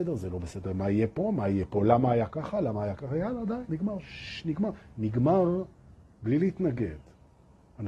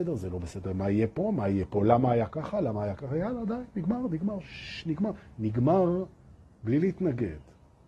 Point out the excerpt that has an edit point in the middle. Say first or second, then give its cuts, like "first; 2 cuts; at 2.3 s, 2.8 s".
first; 1 cut; at 3.7 s